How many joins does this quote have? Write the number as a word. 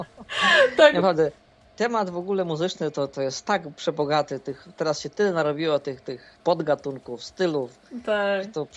one